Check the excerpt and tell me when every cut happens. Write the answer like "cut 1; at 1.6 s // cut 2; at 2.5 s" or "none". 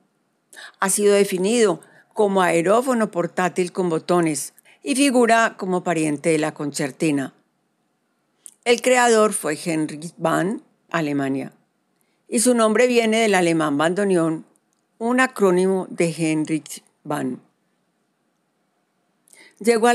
cut 1; at 4.7 s // cut 2; at 10.9 s